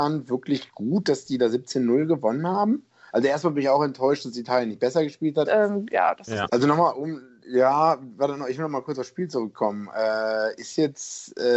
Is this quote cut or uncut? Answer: cut